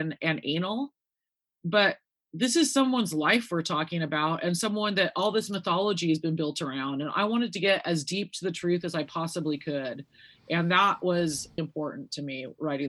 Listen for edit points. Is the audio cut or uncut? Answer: cut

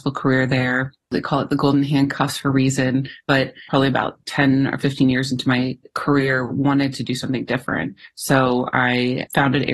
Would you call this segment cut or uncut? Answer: uncut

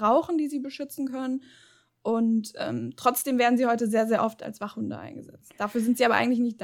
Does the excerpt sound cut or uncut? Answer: uncut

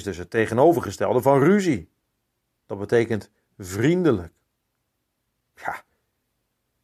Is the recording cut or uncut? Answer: cut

